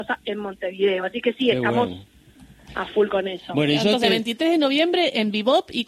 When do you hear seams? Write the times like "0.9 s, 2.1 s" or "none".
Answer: none

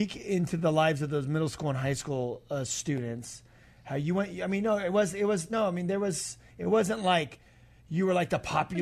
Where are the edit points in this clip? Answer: none

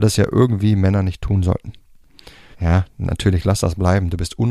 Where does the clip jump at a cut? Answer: 2.5 s

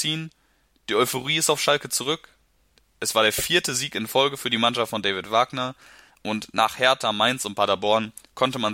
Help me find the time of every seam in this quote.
none

